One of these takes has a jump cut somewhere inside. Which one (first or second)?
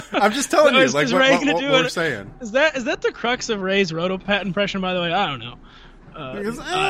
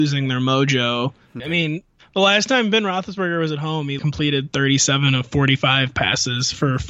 second